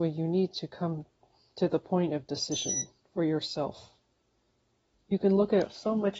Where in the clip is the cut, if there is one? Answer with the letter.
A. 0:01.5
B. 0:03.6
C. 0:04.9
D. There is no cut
C